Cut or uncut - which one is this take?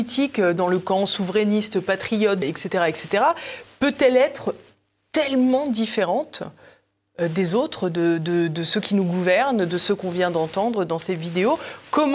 cut